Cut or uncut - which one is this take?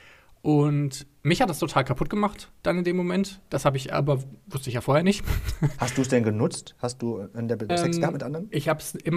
cut